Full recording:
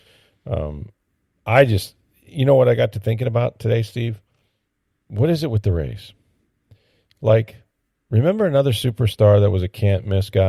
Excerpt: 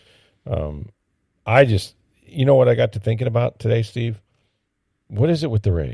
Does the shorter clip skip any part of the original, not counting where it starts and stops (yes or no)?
no